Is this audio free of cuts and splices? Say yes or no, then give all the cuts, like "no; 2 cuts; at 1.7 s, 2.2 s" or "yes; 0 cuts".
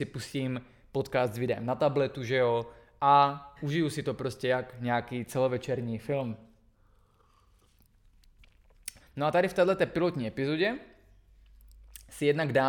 no; 1 cut; at 9.0 s